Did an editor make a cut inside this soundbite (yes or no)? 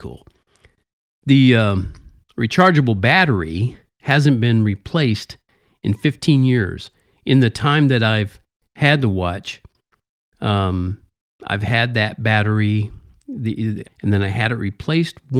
yes